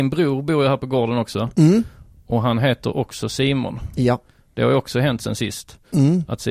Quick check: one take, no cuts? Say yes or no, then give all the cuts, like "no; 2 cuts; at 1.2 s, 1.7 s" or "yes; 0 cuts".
yes; 0 cuts